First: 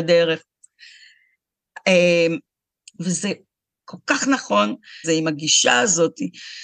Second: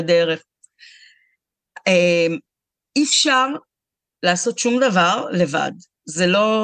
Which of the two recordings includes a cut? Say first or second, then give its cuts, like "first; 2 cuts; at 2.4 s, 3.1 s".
first; 2 cuts; at 2.9 s, 5.0 s